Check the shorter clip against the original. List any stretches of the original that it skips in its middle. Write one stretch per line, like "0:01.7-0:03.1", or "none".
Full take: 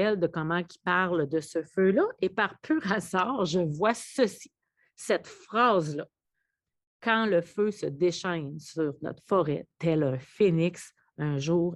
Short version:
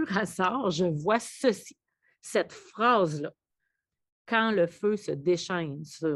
none